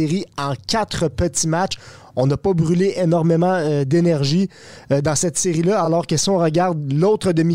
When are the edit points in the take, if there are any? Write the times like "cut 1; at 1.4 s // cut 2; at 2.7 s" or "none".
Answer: none